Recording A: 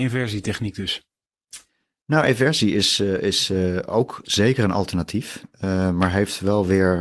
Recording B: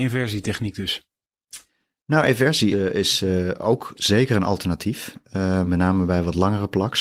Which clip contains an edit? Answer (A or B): B